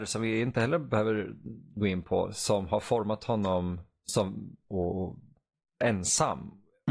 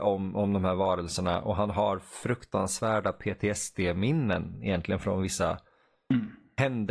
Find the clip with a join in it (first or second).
first